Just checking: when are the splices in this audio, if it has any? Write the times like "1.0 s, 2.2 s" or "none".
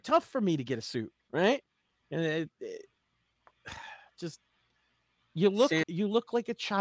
1.2 s, 5.8 s